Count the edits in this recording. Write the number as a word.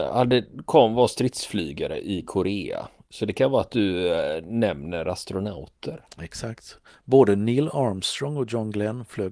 zero